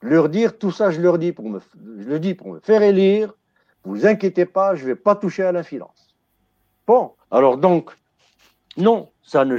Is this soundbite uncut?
no; 1 cut; at 7.2 s

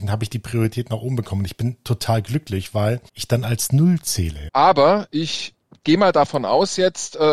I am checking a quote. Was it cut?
yes; 2 cuts; at 3.1 s, 4.5 s

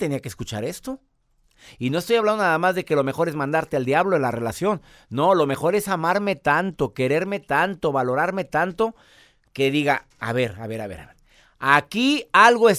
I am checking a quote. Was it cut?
no; 0 cuts

